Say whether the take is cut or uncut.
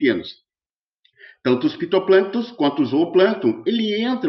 uncut